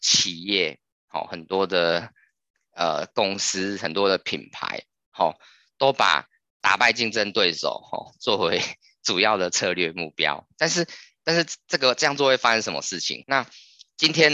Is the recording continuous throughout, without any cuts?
no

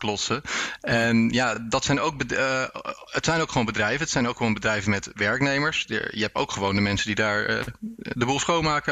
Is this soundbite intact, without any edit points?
yes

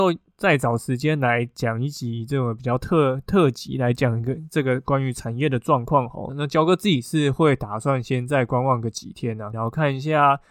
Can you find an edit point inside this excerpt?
yes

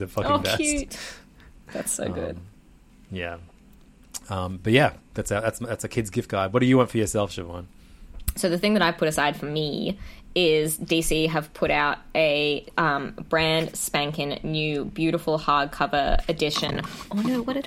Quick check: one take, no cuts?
yes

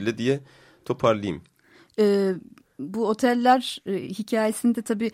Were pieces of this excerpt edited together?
no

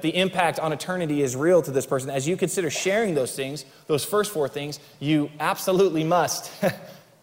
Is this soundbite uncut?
yes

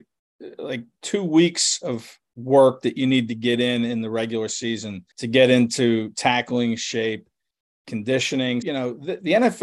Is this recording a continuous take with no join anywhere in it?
no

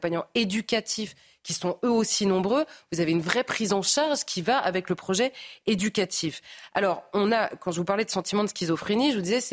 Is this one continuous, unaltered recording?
yes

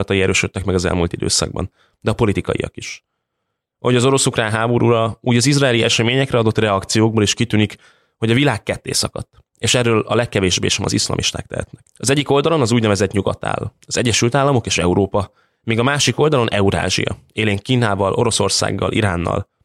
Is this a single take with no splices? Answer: no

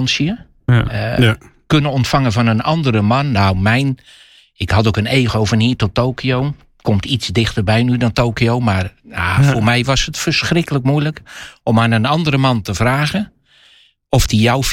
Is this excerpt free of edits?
yes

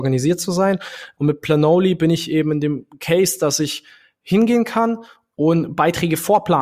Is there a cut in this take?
yes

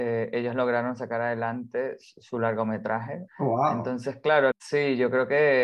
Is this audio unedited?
no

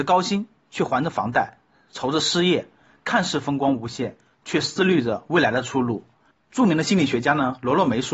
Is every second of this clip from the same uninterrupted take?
no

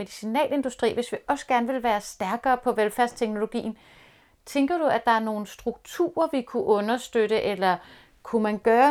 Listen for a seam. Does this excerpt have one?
no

